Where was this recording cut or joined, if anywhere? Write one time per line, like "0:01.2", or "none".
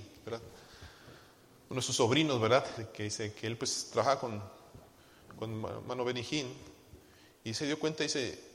0:02.8